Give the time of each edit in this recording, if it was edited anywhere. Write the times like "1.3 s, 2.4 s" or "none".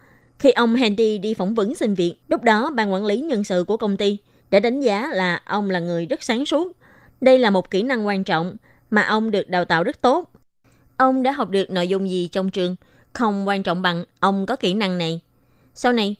2.2 s

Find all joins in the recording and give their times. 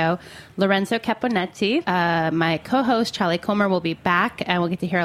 1.8 s

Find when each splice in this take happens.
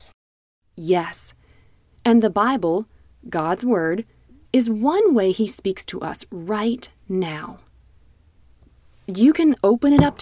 none

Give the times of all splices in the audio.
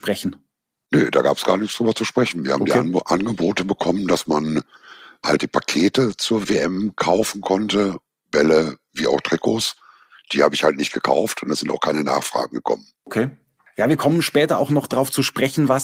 none

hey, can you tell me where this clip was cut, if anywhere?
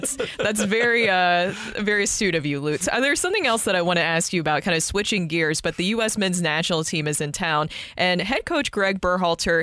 none

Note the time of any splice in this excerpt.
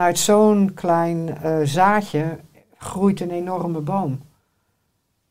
none

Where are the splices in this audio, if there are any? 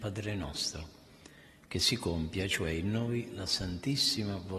none

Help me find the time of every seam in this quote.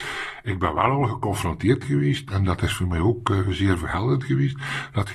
none

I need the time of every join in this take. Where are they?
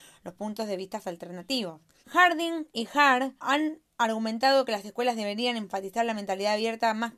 2.0 s, 3.4 s

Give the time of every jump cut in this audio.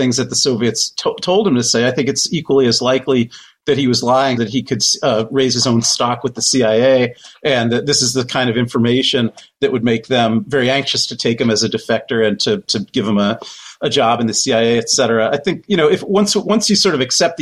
4.4 s

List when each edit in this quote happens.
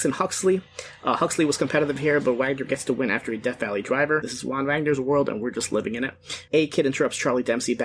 4.2 s, 6.5 s

